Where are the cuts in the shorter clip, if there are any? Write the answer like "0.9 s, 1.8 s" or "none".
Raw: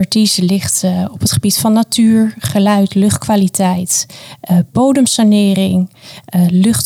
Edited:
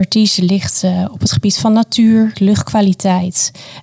2.3 s